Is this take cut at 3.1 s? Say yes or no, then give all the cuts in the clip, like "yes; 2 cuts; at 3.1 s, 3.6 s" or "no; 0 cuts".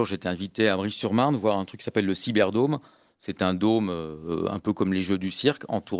no; 0 cuts